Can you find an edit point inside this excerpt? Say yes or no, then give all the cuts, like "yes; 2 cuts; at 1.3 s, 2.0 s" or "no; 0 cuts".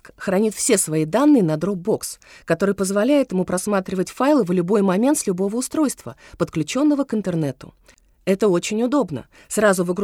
no; 0 cuts